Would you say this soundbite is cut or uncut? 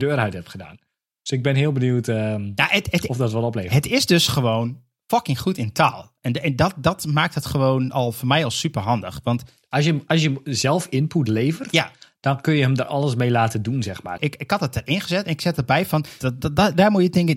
cut